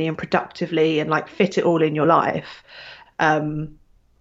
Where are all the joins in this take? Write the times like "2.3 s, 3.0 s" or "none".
3.1 s